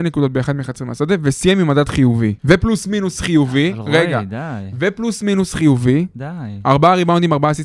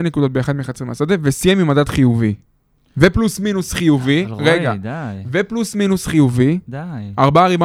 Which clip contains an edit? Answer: first; 1 cut; at 2.4 s

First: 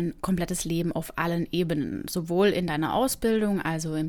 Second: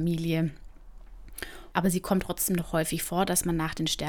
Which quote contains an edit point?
second; 1 cut; at 1.7 s

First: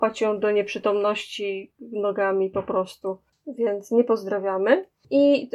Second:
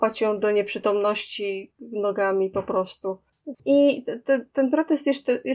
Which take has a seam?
second; 1 cut; at 3.5 s

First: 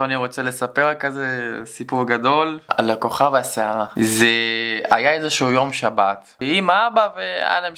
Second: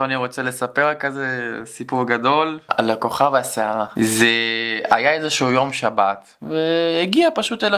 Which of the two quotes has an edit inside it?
first; 1 cut; at 6.4 s

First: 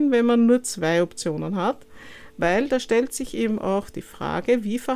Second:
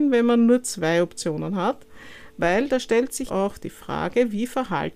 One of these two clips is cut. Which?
second; 1 cut; at 3.3 s

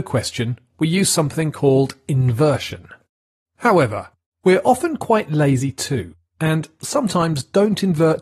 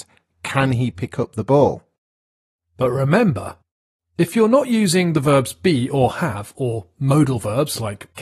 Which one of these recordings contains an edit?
first; 1 cut; at 3.4 s

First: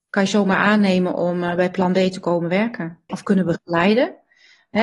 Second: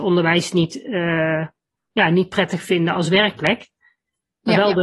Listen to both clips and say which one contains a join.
first; 1 cut; at 3.1 s

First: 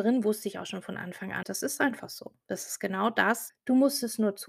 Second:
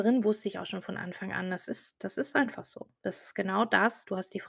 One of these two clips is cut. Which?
first; 2 cuts; at 1.4 s, 3.5 s

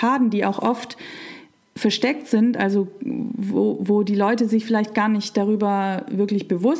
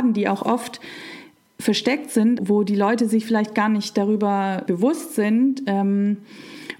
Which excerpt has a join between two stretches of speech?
second; 2 cuts; at 2.4 s, 4.7 s

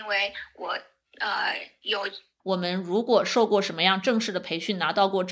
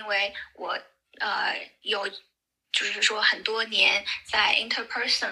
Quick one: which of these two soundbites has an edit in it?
first; 1 cut; at 2.4 s

